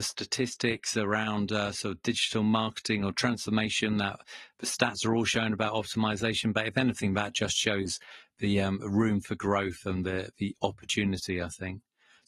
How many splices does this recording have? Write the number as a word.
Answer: zero